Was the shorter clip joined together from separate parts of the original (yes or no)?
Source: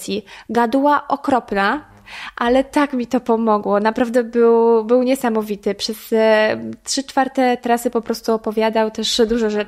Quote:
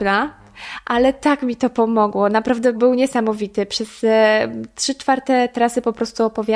yes